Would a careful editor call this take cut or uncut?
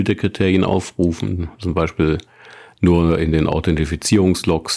uncut